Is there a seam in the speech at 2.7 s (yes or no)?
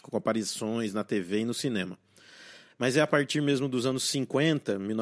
yes